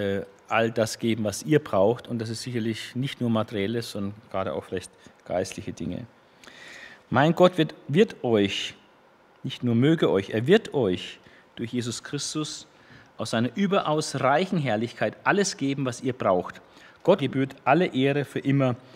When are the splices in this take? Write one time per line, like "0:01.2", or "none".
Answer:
0:17.2